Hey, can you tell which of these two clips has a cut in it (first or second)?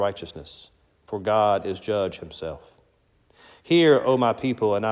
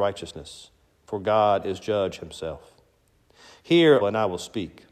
second